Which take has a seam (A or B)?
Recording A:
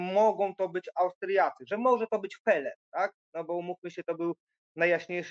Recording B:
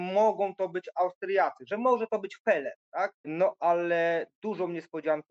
B